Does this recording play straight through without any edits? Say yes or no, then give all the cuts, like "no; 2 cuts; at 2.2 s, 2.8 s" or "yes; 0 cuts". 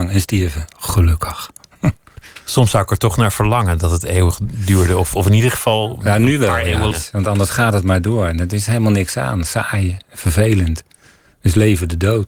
no; 1 cut; at 6.9 s